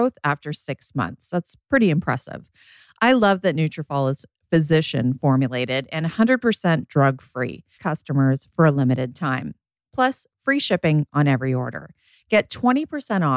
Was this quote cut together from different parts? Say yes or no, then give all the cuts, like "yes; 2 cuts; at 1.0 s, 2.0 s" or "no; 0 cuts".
yes; 1 cut; at 7.8 s